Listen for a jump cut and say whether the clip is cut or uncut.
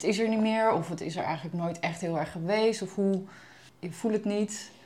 uncut